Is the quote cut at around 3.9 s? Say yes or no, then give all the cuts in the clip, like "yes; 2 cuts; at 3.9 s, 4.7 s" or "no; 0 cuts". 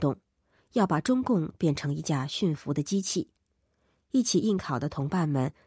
yes; 1 cut; at 3.9 s